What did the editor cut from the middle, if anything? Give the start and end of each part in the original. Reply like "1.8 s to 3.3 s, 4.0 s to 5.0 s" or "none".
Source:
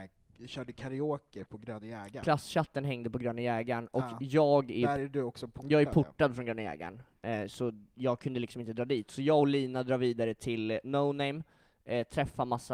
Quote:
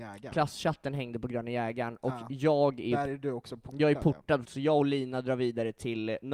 6.3 s to 9.1 s